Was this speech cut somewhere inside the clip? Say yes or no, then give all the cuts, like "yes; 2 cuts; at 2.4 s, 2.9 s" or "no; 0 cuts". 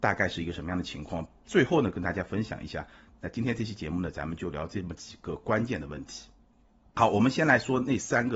yes; 1 cut; at 3.1 s